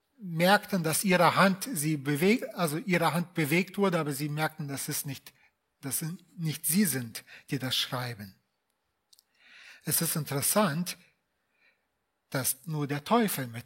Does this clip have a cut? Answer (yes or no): no